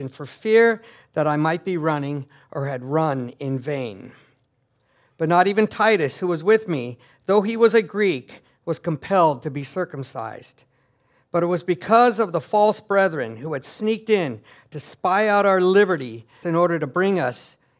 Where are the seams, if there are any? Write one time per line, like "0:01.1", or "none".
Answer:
0:16.4